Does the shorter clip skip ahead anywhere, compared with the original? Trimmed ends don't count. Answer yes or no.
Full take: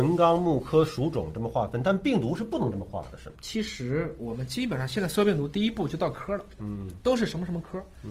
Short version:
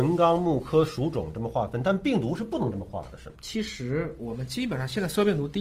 no